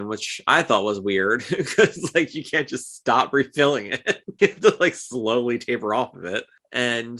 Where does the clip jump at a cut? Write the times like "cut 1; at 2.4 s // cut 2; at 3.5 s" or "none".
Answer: cut 1; at 4.4 s